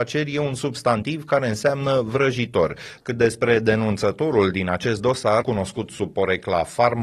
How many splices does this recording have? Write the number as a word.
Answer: two